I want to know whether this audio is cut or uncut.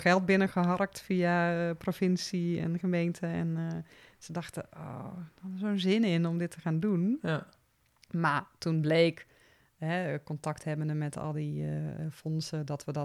uncut